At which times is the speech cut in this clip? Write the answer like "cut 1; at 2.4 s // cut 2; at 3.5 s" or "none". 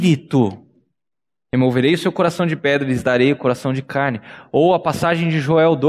none